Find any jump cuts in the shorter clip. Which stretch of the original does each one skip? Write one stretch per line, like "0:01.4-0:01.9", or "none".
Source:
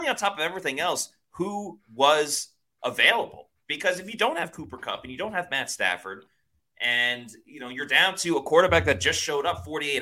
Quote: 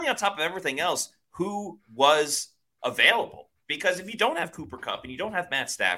none